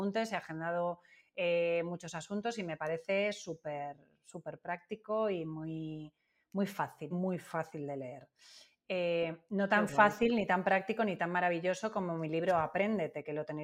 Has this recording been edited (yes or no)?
yes